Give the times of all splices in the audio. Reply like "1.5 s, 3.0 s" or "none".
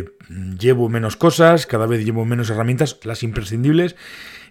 1.7 s, 3.0 s